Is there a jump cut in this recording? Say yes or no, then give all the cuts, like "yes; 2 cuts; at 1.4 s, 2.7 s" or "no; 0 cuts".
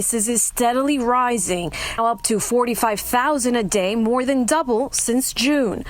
yes; 1 cut; at 2.0 s